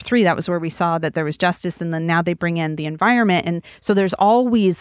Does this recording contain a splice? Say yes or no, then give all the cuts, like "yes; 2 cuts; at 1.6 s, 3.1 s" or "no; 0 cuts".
no; 0 cuts